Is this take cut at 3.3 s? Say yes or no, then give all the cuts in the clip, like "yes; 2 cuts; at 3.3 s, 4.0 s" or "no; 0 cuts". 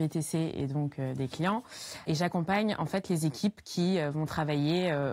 no; 1 cut; at 2.0 s